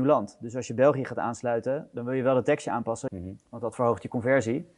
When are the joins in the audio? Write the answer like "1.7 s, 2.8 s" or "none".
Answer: 3.1 s